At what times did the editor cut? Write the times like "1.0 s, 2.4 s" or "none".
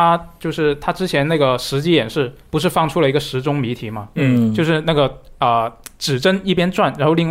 none